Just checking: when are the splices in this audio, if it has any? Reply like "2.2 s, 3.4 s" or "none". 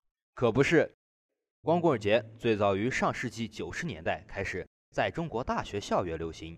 1.5 s